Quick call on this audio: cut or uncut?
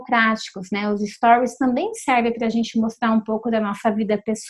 uncut